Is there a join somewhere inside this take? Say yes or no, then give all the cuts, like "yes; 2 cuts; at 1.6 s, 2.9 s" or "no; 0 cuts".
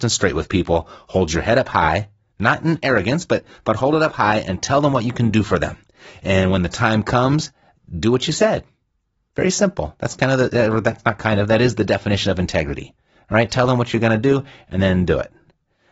no; 0 cuts